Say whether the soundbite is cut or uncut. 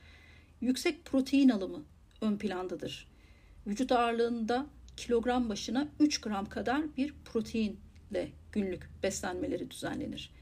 uncut